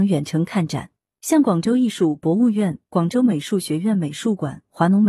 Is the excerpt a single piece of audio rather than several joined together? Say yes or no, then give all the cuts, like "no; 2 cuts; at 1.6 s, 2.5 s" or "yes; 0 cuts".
yes; 0 cuts